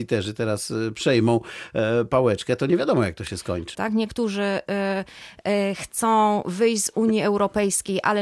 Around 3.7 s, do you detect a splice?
yes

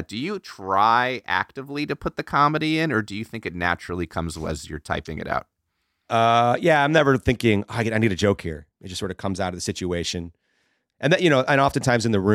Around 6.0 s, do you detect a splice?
no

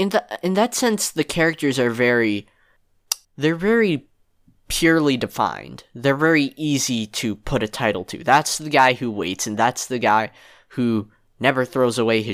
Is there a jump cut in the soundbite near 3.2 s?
yes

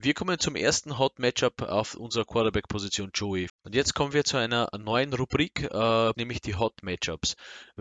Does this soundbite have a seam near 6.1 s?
yes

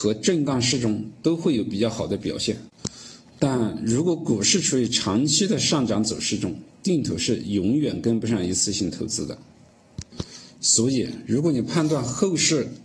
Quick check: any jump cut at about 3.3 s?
no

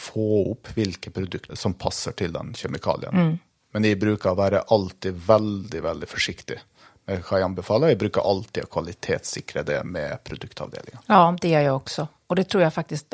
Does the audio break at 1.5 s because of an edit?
yes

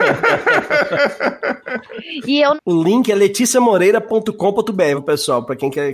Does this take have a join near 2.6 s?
yes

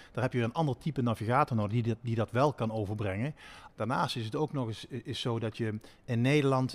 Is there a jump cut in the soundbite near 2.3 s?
no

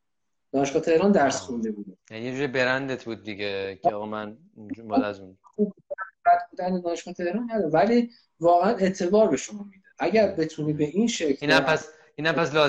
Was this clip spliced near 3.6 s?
no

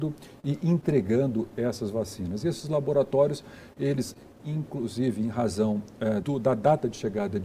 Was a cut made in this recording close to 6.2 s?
yes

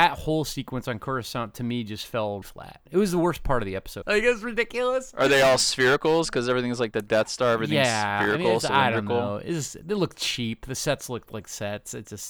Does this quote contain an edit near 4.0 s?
yes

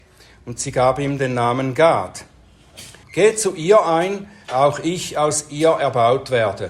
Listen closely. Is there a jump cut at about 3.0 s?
yes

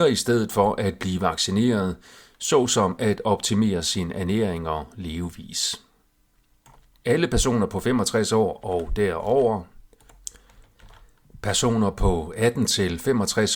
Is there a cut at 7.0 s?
yes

